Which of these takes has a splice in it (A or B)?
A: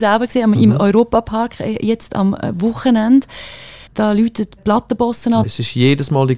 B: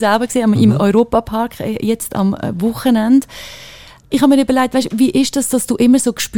A